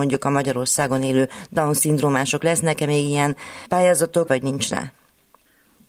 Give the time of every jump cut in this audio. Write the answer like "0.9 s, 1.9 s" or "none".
4.3 s